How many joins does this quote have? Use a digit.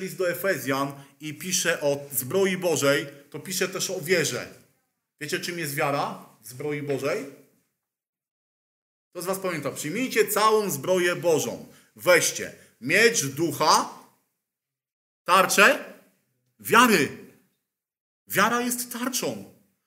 0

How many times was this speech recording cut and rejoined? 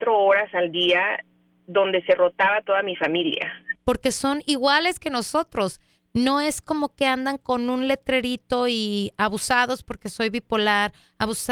2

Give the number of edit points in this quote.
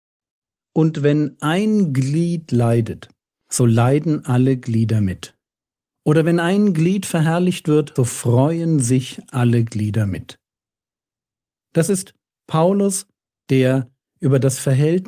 1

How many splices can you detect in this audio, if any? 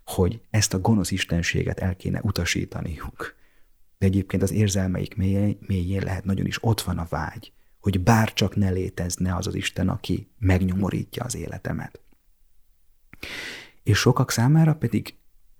0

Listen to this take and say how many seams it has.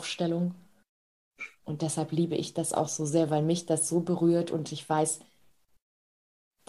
0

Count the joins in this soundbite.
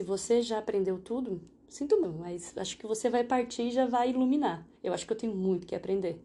2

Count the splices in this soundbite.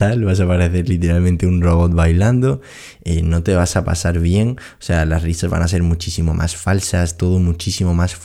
0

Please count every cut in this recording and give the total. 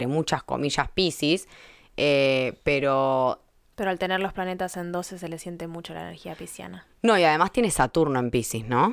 0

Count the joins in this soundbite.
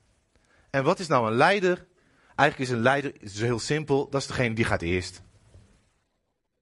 0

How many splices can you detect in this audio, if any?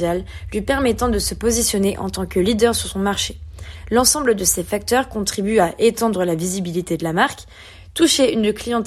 0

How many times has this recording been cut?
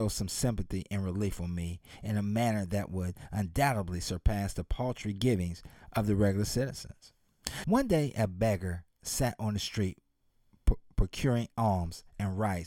1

